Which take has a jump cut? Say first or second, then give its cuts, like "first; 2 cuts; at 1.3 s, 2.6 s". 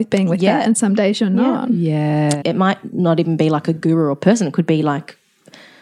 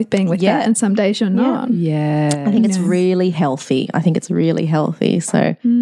first; 1 cut; at 2.4 s